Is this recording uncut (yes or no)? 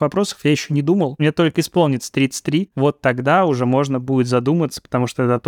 yes